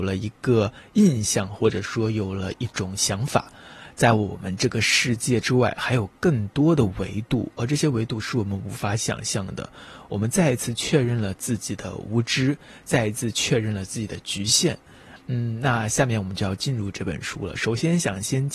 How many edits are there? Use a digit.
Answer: 1